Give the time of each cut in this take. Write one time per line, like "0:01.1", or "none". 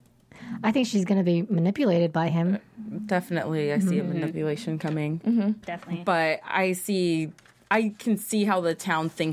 0:05.6